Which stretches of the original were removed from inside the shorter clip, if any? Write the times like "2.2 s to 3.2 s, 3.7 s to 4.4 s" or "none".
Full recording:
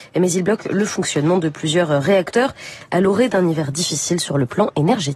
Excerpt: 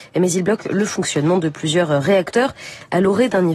none